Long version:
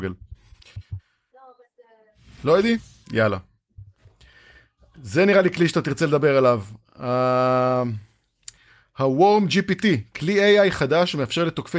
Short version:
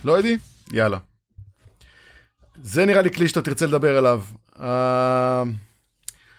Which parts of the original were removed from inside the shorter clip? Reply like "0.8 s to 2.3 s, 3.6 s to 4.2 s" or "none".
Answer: none